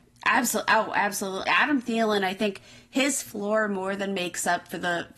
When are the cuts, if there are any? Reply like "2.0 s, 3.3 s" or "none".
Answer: 1.5 s